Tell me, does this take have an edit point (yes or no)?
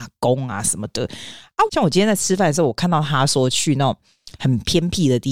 yes